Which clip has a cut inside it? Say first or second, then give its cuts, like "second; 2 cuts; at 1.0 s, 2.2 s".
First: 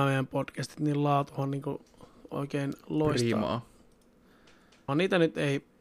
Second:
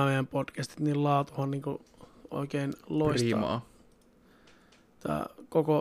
first; 1 cut; at 4.9 s